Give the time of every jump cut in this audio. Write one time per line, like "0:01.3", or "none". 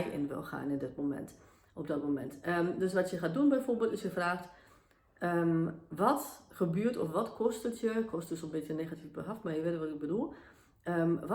none